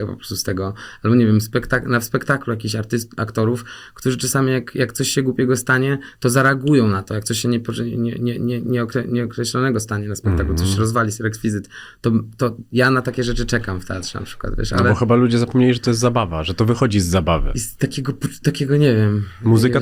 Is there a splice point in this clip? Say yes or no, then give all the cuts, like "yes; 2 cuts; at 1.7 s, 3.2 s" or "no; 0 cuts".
yes; 1 cut; at 18.4 s